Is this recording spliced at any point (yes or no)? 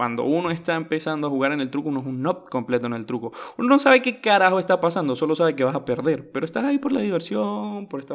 no